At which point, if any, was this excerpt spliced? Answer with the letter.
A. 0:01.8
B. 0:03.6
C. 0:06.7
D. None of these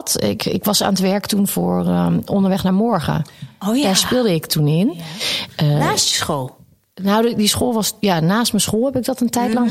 D